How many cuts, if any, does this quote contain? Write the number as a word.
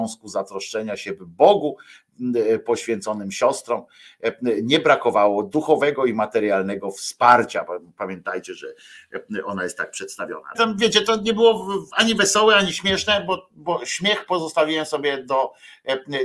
one